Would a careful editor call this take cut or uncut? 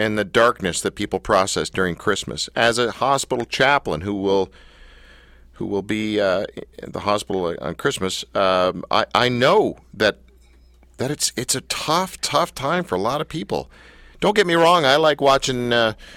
uncut